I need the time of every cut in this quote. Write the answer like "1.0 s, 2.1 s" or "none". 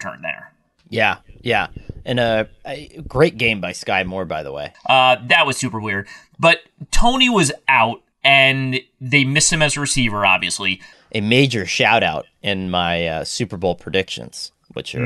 4.7 s, 8.1 s, 10.9 s